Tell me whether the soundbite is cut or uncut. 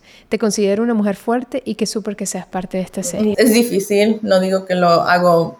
cut